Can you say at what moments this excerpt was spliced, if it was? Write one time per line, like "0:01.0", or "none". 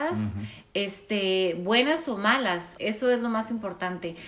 0:02.8